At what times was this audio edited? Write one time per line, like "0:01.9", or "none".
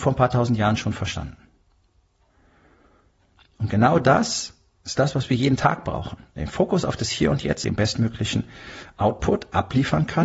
0:07.6

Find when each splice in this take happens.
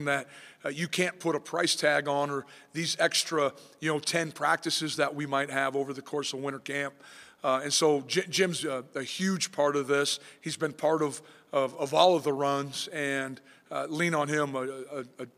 none

